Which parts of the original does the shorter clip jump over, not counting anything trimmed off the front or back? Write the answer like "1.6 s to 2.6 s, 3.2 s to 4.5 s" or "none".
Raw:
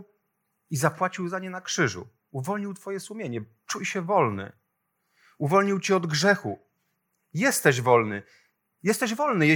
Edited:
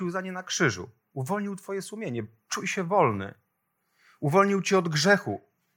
none